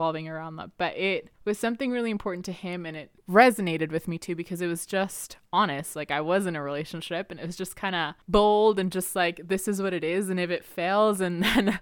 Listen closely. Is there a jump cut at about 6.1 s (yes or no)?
no